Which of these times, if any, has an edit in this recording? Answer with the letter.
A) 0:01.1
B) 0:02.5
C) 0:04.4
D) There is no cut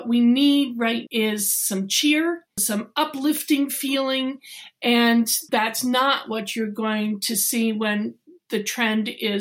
A